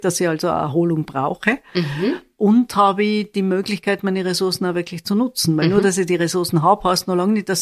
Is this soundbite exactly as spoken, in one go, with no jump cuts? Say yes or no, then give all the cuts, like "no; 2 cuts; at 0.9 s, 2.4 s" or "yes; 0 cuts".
yes; 0 cuts